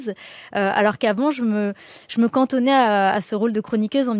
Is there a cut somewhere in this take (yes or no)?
no